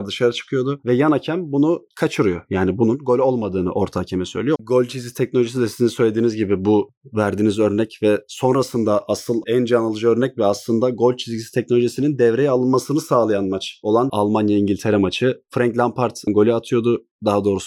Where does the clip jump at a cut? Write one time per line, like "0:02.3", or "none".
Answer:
0:04.5